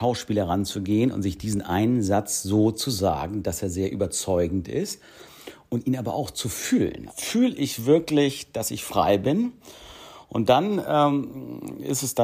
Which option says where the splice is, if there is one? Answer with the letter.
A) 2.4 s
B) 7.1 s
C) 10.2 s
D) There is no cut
B